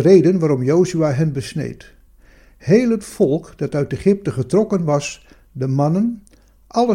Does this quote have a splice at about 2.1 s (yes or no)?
no